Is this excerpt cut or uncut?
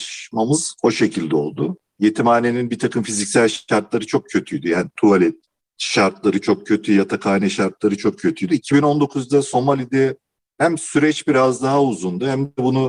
cut